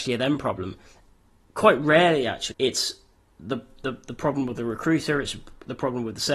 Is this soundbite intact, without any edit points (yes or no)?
no